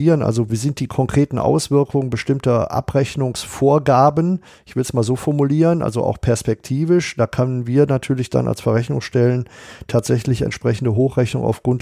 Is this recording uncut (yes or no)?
yes